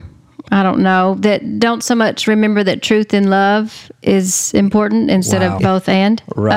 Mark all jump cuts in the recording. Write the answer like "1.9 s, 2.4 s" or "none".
5.6 s